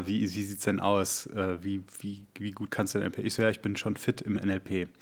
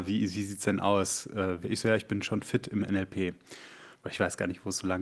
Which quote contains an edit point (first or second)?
second